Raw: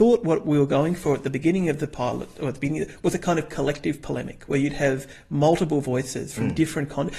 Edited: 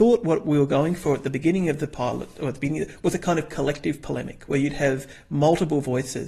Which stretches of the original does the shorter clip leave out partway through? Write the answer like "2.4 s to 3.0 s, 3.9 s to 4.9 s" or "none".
none